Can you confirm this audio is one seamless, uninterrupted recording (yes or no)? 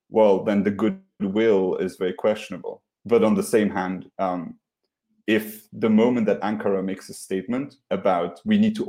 no